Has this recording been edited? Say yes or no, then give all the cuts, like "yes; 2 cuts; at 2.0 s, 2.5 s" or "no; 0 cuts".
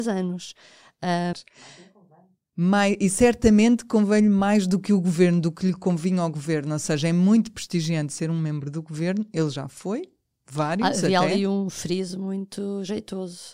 yes; 1 cut; at 1.3 s